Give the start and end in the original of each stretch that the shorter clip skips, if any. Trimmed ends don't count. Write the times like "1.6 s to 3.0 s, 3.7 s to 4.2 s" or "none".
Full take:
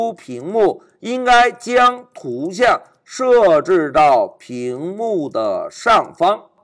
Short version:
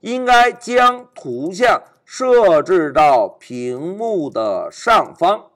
none

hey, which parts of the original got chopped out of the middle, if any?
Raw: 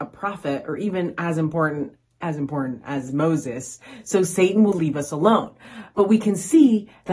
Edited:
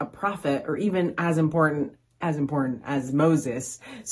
none

